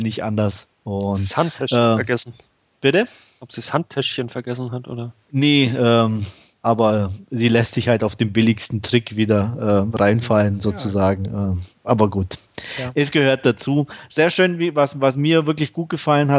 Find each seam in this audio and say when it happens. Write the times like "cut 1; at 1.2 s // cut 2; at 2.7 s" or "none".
none

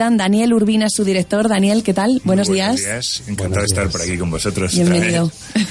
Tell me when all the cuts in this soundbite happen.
none

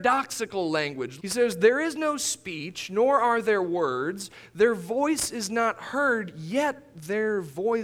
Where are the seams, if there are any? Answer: cut 1; at 1.2 s

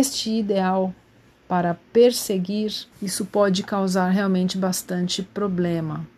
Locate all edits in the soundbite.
cut 1; at 1.8 s // cut 2; at 2.9 s

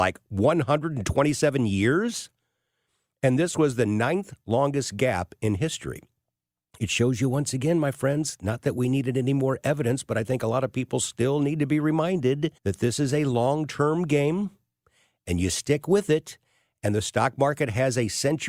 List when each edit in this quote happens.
cut 1; at 12.6 s

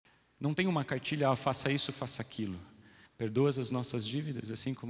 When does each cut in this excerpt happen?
cut 1; at 3.1 s

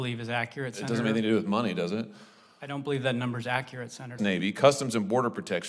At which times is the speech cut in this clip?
cut 1; at 4.2 s

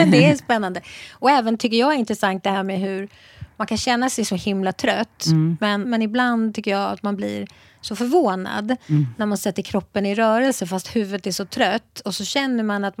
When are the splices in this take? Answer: cut 1; at 5.8 s

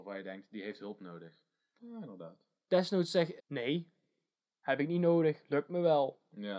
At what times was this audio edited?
cut 1; at 1.8 s // cut 2; at 3.4 s

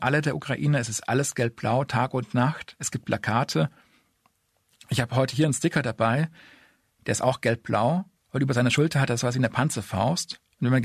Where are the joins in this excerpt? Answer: cut 1; at 8.2 s

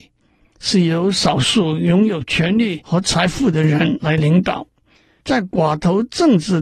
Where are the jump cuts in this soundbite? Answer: cut 1; at 5.2 s

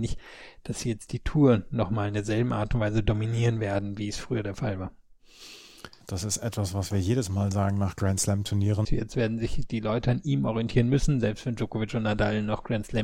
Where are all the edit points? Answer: cut 1; at 6.0 s // cut 2; at 8.8 s

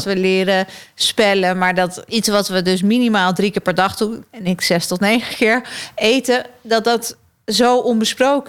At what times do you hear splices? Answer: none

